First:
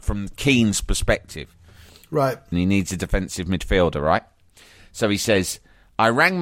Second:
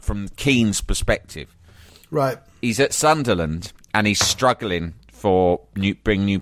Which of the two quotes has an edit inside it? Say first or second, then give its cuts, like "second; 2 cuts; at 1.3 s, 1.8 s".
first; 1 cut; at 2.5 s